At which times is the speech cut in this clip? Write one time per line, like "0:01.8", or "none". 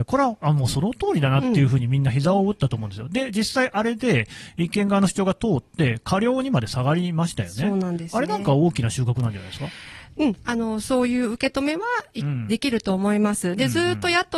0:12.5